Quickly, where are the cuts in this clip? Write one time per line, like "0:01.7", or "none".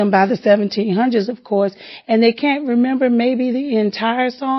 none